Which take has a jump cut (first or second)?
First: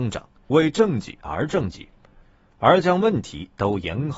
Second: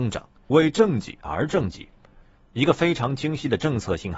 second